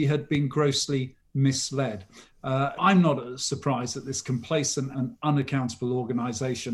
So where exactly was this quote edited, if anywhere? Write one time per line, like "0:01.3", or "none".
0:02.8
0:04.9